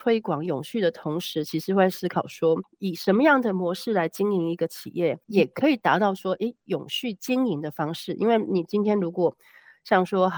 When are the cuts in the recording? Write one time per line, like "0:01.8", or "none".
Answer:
0:05.2